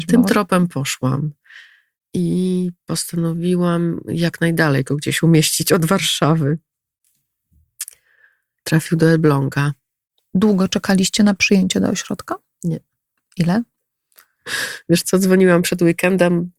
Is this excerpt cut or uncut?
uncut